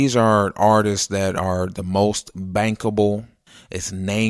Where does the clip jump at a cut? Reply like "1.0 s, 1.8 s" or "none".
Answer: none